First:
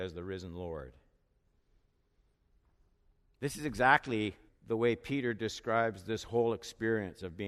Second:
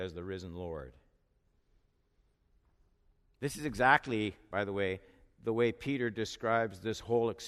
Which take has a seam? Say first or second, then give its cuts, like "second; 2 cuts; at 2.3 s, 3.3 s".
first; 1 cut; at 4.5 s